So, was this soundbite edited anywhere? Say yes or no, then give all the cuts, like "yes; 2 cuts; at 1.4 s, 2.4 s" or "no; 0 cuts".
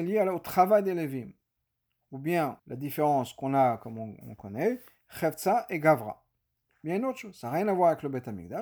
yes; 2 cuts; at 2.6 s, 6.6 s